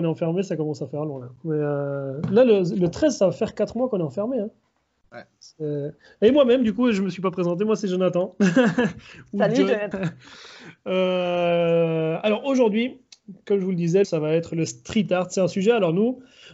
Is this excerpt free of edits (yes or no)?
no